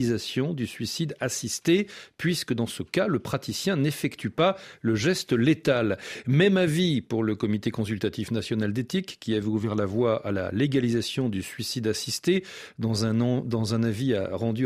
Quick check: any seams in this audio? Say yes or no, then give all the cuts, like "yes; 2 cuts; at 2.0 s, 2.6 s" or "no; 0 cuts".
no; 0 cuts